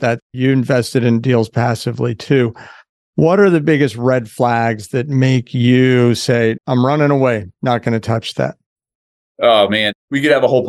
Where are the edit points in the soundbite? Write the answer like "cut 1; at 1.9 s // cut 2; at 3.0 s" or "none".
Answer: cut 1; at 6.6 s